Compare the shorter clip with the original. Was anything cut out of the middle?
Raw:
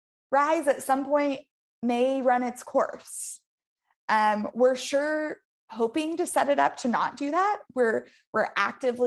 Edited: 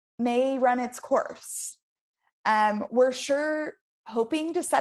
no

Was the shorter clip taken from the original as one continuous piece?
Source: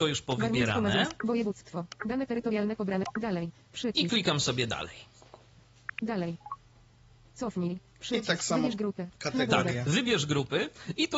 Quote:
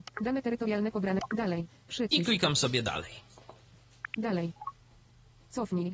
yes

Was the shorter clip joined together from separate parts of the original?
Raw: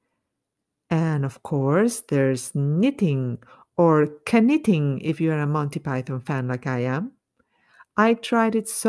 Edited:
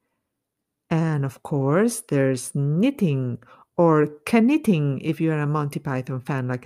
no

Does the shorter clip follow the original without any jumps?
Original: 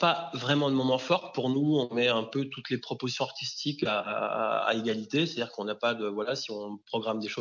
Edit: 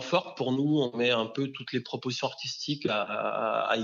yes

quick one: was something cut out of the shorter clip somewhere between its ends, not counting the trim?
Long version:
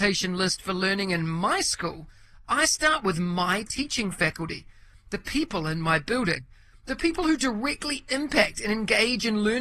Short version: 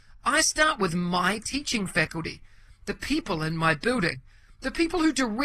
no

